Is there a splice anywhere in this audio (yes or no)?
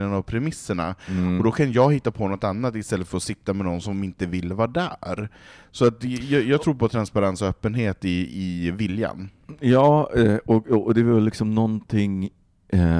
no